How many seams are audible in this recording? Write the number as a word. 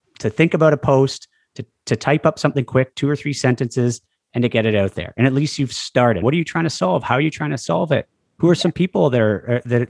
one